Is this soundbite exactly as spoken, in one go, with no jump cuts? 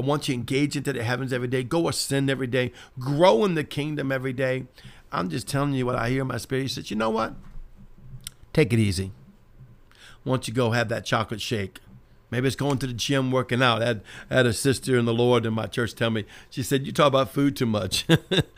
no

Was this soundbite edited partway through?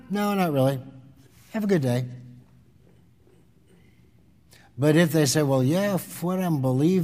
no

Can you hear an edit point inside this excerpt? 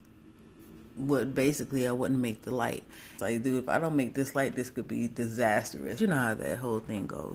yes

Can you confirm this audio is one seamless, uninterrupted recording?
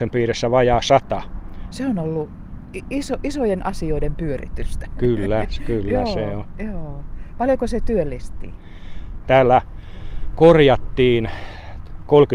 no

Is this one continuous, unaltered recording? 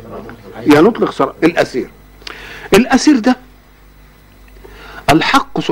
no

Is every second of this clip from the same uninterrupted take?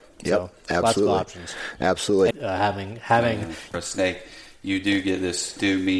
no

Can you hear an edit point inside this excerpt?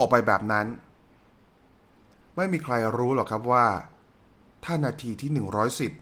no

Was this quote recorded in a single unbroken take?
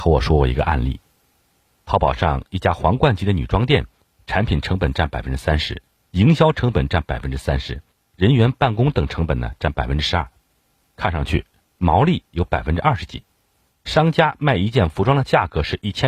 no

